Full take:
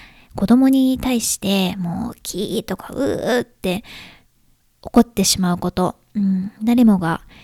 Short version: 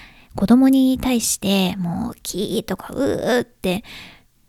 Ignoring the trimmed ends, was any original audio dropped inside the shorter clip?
no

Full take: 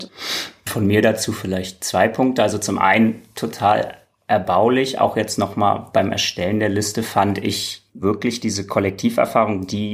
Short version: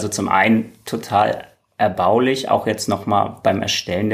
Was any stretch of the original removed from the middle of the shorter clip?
no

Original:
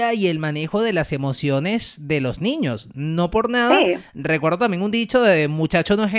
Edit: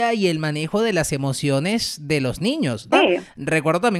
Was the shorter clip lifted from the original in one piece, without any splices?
no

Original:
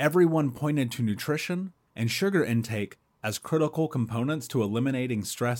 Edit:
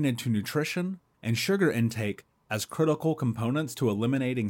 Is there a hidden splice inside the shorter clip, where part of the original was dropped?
no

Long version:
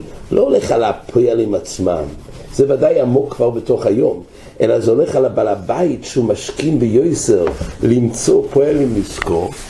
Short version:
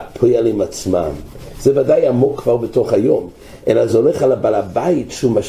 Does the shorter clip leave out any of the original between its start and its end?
no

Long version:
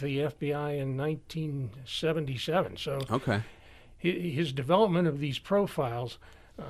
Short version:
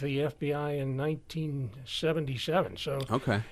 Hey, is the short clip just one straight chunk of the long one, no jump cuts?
yes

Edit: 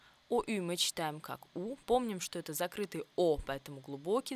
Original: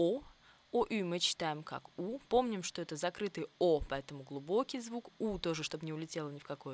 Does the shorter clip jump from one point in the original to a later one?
no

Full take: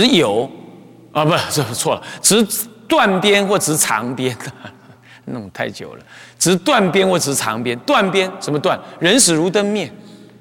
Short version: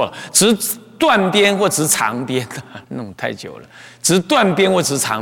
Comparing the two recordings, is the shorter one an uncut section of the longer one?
no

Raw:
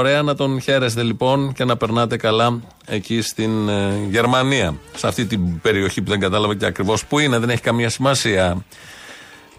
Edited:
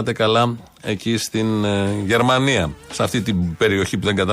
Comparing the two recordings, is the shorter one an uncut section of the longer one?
yes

